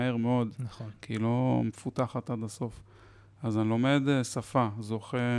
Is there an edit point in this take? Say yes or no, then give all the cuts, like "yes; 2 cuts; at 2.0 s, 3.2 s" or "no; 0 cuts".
no; 0 cuts